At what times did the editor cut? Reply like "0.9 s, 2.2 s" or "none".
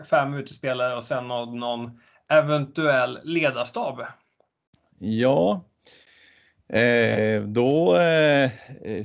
none